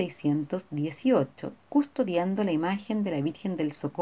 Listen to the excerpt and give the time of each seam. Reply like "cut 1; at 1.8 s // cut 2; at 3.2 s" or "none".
cut 1; at 1.6 s